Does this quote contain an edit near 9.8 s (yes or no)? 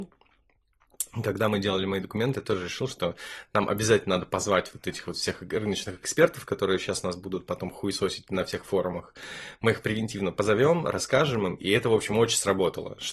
yes